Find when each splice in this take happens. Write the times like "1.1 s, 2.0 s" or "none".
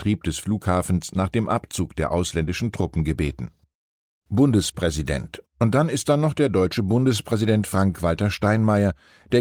none